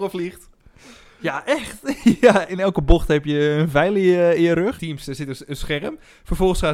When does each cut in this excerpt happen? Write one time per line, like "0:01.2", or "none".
0:02.5
0:04.8

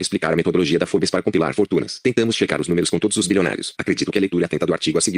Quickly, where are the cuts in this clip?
0:02.0
0:03.8

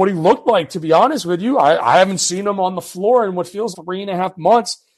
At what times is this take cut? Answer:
0:03.7

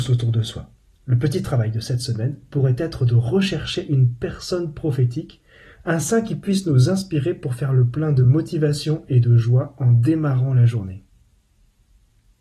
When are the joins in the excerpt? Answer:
none

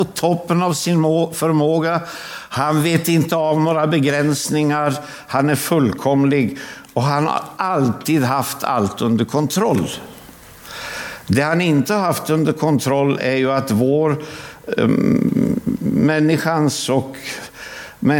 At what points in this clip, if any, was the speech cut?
none

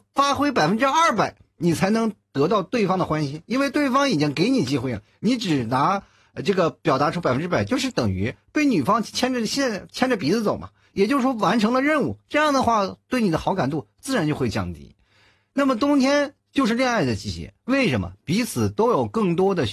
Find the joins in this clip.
none

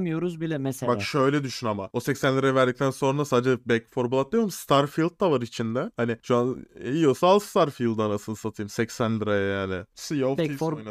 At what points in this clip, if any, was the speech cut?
0:09.9

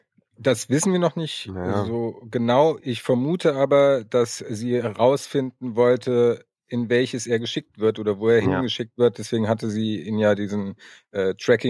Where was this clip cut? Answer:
none

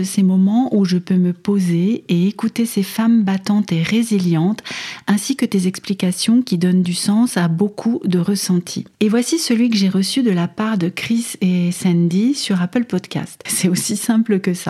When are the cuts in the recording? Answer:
0:08.9
0:13.5

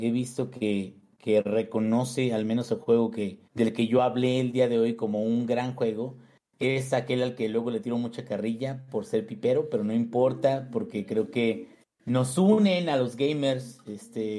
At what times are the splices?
0:03.4

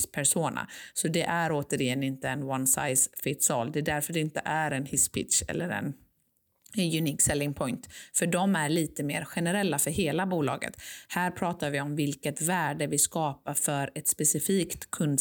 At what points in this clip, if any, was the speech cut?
none

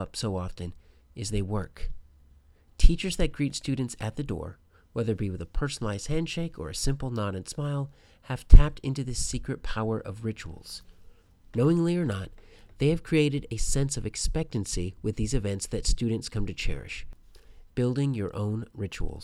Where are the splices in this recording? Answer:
0:17.7

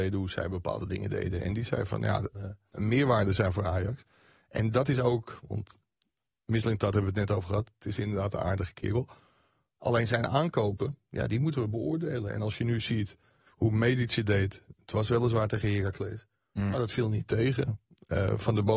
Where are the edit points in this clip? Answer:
0:02.3

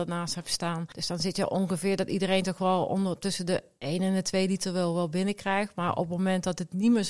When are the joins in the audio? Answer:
0:00.9

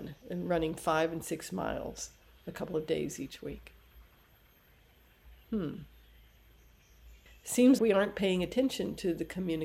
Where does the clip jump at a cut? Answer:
0:05.4
0:07.8

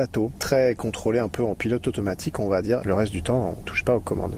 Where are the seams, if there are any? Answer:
0:02.8

